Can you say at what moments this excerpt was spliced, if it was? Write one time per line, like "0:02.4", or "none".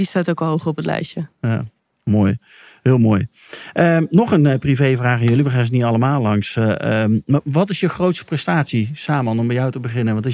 none